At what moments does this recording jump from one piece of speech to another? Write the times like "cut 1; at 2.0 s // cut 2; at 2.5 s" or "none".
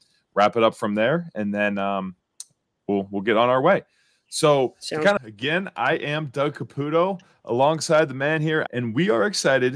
cut 1; at 5.2 s // cut 2; at 8.7 s